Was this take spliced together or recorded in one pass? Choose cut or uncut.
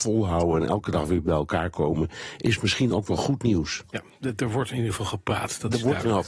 uncut